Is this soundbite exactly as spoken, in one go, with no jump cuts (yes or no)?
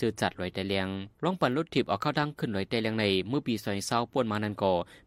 no